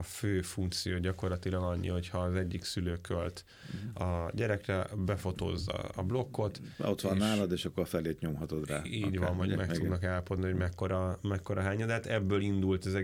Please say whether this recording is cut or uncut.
uncut